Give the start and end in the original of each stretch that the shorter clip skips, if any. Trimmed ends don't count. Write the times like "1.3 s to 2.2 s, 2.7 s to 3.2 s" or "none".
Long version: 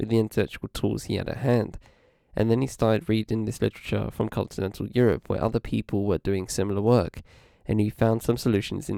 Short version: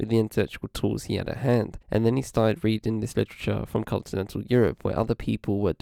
1.8 s to 2.3 s